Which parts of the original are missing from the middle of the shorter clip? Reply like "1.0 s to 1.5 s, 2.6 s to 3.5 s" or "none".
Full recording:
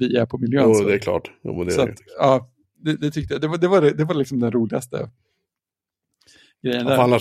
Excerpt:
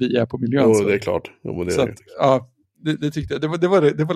none

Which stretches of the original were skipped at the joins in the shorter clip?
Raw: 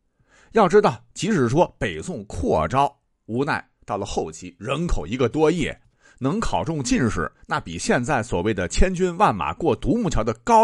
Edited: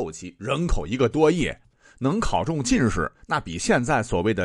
none

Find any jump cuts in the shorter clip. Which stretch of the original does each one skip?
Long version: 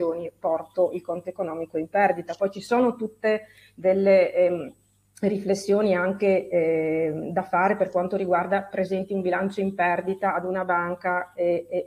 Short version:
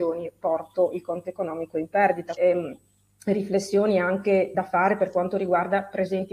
2.4 s to 4.3 s, 6.5 s to 7.3 s

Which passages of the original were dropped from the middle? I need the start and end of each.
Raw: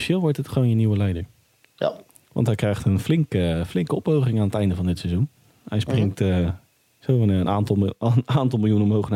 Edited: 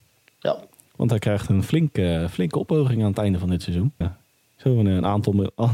5.4 s to 6.4 s

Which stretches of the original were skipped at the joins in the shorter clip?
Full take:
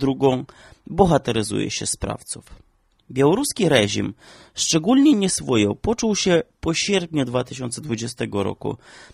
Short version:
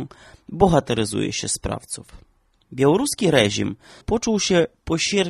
4.4 s to 5.8 s

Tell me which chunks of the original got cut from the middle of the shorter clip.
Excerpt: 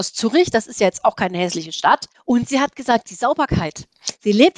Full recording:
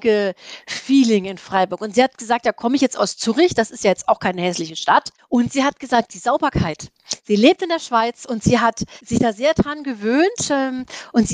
none

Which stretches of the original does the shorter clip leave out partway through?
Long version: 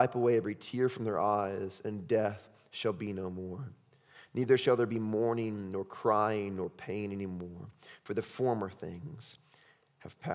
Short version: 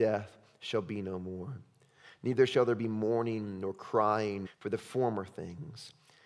6.6 s to 7.9 s

